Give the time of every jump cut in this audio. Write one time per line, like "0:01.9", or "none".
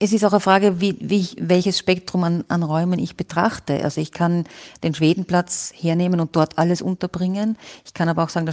none